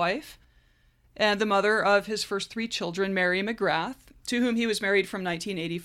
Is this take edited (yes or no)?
no